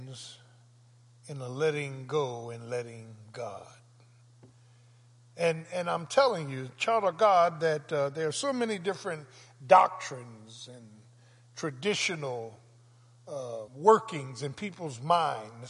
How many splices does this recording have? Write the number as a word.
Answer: one